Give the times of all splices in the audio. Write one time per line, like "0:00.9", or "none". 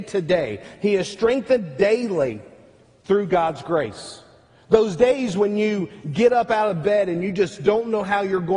none